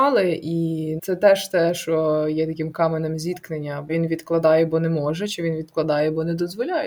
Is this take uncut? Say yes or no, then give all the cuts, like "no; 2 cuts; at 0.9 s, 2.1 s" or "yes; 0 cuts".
no; 2 cuts; at 1.0 s, 3.9 s